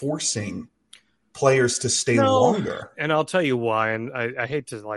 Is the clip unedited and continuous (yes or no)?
no